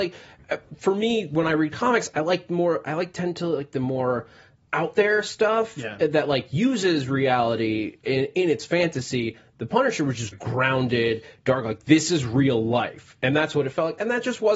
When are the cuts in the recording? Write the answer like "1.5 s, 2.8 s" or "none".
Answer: 10.3 s